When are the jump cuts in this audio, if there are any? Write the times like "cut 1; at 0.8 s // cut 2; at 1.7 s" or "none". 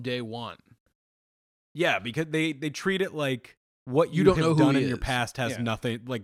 cut 1; at 1.6 s